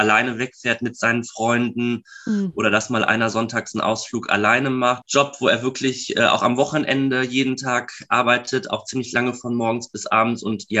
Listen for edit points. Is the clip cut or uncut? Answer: cut